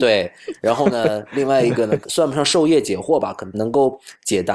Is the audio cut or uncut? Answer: cut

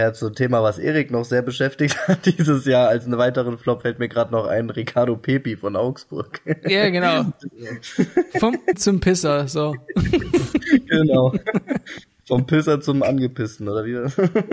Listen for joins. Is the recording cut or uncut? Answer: cut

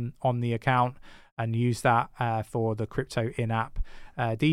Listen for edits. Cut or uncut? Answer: uncut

